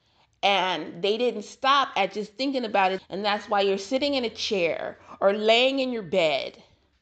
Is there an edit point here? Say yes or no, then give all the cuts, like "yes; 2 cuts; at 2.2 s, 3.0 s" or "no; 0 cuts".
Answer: yes; 1 cut; at 3.0 s